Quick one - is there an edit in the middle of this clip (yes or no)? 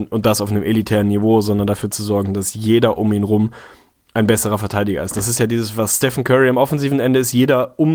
no